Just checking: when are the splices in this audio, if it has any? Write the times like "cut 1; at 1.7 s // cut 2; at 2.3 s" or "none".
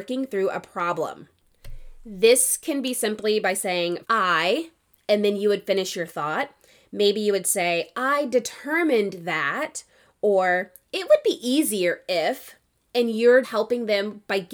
cut 1; at 4.0 s // cut 2; at 13.4 s